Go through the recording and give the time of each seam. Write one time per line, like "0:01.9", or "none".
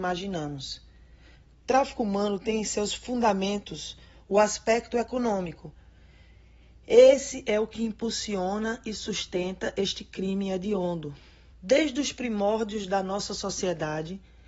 0:11.5